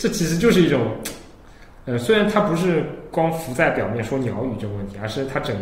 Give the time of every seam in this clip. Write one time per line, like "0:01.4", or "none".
none